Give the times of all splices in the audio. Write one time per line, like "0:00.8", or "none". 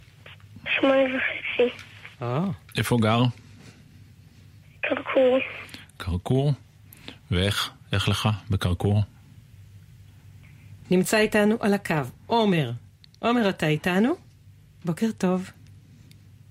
0:10.8
0:14.8